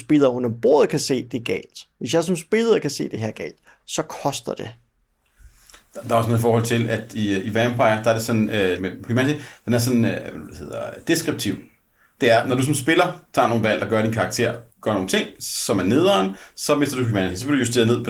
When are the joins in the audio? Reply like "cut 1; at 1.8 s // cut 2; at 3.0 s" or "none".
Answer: cut 1; at 8.8 s // cut 2; at 14.7 s